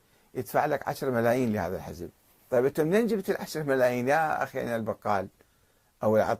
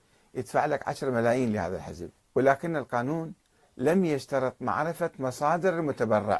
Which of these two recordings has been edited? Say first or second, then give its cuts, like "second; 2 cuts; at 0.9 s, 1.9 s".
second; 1 cut; at 2.2 s